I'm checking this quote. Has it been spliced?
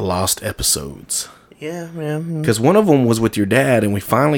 no; 0 cuts

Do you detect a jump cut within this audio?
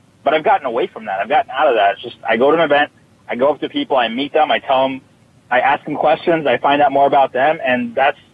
no; 0 cuts

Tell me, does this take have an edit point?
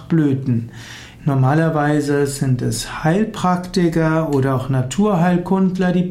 yes; 1 cut; at 1.2 s

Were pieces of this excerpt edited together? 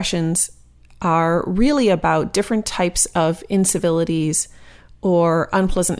no; 0 cuts

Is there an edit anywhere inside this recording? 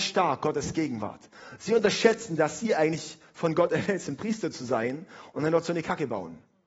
no; 0 cuts

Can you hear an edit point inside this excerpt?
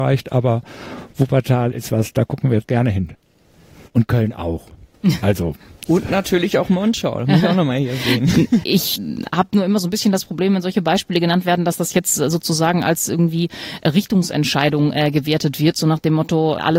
yes; 1 cut; at 8.6 s

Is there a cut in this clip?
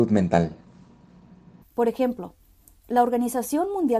yes; 1 cut; at 1.6 s

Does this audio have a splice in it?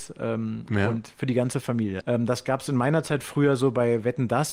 yes; 1 cut; at 2.0 s

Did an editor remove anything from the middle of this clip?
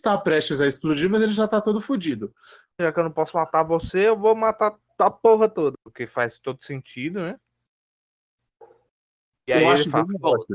yes; 2 cuts; at 2.8 s, 5.7 s

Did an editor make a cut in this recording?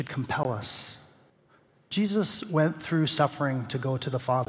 no; 0 cuts

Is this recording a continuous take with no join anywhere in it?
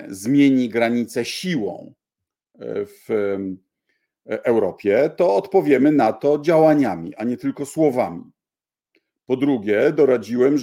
yes; 0 cuts

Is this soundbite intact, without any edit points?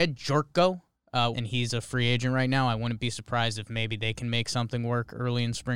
no; 1 cut; at 1.3 s

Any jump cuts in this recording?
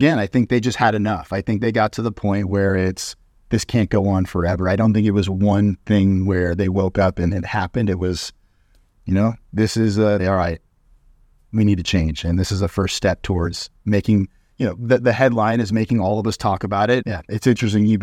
yes; 2 cuts; at 10.2 s, 17.0 s

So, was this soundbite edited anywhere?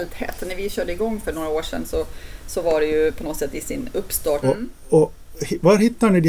yes; 1 cut; at 4.4 s

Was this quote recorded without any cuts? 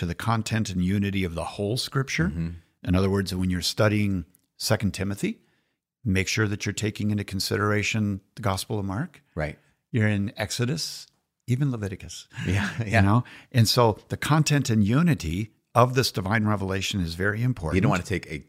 yes; 0 cuts

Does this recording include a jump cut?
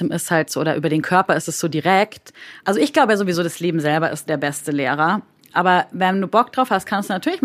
yes; 1 cut; at 2.6 s

